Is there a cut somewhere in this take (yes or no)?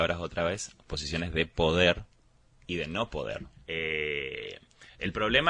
yes